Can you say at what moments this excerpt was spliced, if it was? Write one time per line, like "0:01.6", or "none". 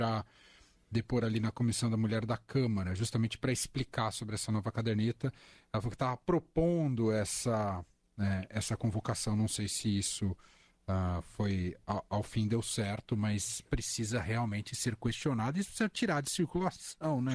none